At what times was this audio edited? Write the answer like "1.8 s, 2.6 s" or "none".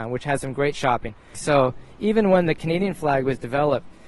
1.3 s